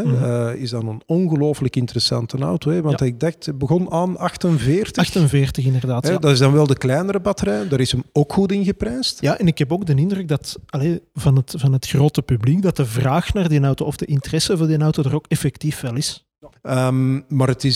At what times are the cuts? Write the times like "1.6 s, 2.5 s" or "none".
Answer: 9.2 s, 16.5 s

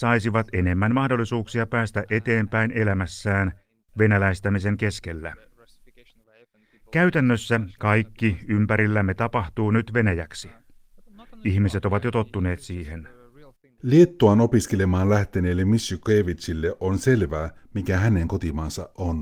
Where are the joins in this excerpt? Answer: none

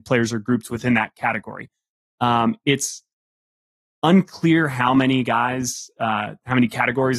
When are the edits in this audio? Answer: none

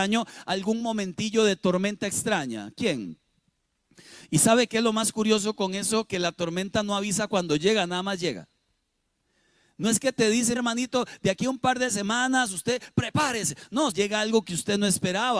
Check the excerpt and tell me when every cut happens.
10.6 s, 13.9 s

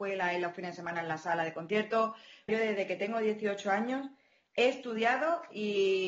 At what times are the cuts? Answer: 2.5 s

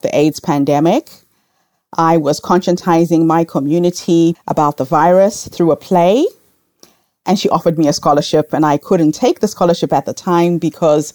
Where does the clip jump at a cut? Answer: 4.4 s

